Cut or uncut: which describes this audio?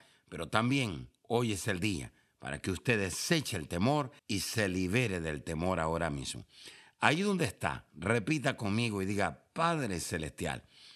cut